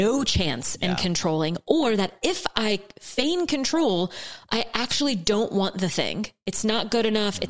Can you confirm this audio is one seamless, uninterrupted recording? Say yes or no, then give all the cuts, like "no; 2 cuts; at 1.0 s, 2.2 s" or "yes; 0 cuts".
yes; 0 cuts